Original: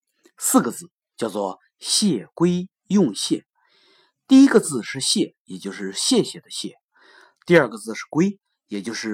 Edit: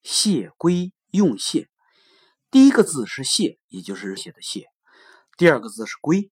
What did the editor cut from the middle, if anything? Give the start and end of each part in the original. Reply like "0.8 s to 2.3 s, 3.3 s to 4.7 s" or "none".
5.9 s to 6.3 s